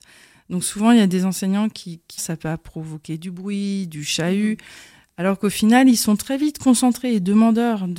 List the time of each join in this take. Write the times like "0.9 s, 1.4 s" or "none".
2.2 s